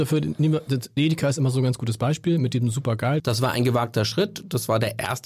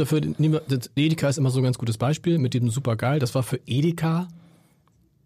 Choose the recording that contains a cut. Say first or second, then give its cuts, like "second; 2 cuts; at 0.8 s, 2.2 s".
first; 1 cut; at 3.2 s